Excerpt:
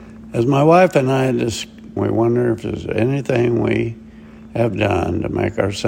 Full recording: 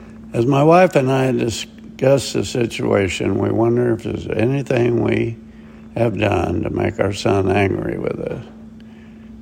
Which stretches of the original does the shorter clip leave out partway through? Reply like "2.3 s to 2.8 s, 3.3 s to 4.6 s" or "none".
2.0 s to 3.4 s